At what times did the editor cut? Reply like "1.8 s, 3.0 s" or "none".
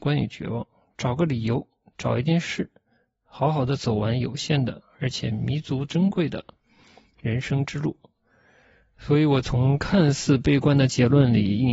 none